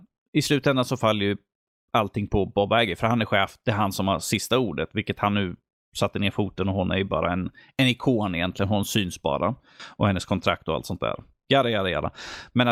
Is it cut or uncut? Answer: uncut